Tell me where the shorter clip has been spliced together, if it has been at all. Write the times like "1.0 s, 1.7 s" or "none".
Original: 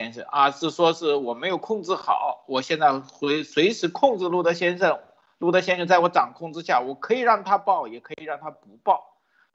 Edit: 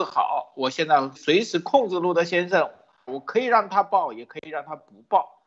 1.2 s, 3.1 s